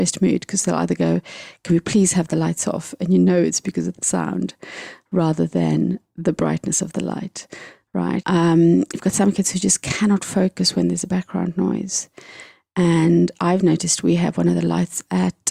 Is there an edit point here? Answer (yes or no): yes